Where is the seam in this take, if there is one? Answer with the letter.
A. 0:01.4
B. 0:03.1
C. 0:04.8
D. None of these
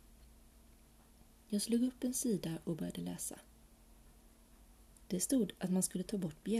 D